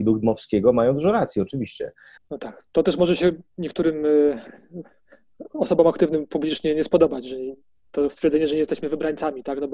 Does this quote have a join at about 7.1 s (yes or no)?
no